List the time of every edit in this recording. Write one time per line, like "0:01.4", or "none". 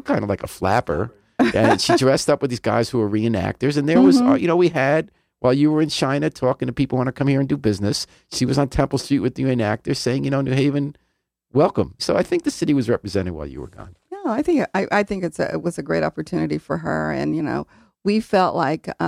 0:12.0